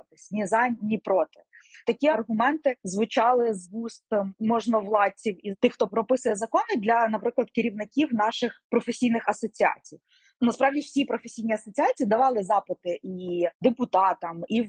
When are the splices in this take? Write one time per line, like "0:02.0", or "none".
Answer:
none

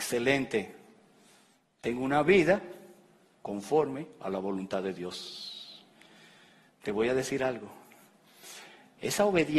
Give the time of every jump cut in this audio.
none

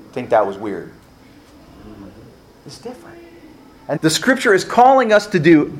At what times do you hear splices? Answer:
0:04.0

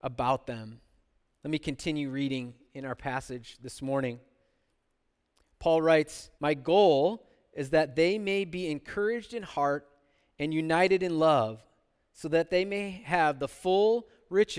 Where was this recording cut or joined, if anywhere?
0:06.4

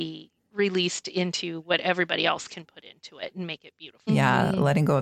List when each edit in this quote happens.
0:04.1

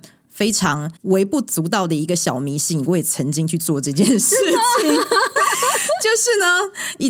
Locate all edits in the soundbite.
0:01.0

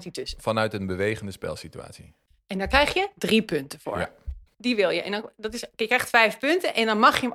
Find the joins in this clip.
0:04.5

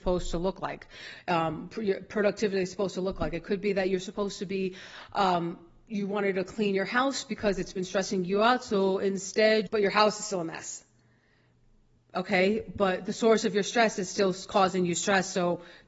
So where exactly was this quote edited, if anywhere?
0:09.7

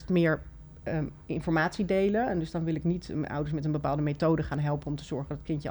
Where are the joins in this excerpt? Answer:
none

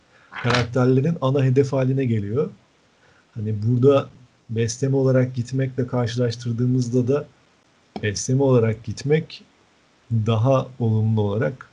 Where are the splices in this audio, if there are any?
none

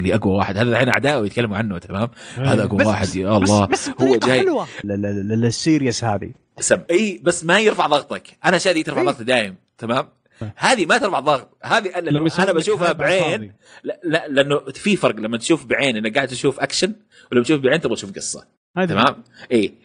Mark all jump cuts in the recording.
0:04.8
0:06.9

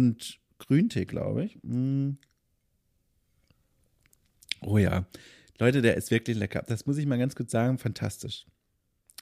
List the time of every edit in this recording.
none

